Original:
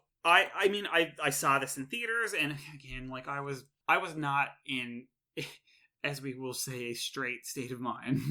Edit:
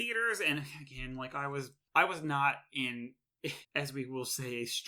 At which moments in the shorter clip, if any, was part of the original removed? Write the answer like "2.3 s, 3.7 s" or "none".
3.6 s